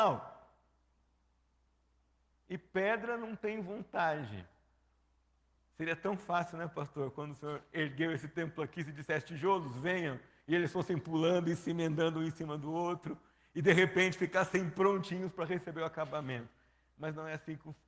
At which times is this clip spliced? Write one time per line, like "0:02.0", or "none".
none